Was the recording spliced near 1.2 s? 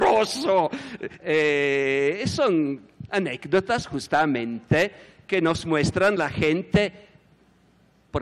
yes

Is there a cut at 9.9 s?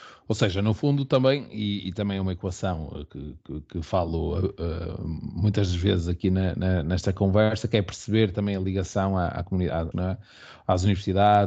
yes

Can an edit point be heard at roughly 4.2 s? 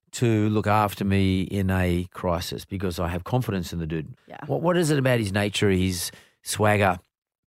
yes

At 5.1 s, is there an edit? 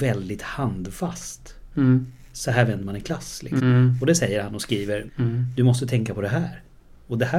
yes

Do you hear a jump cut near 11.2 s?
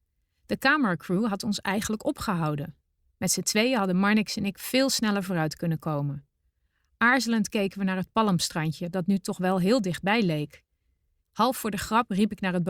yes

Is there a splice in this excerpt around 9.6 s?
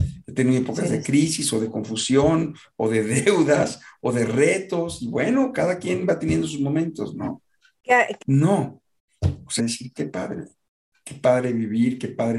yes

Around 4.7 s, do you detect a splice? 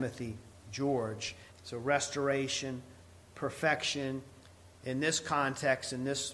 no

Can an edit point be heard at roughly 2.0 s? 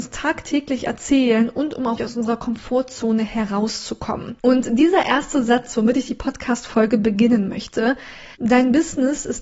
yes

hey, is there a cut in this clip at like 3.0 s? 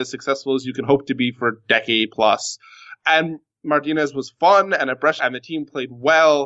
no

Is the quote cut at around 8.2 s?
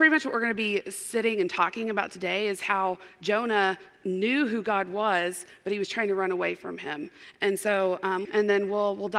yes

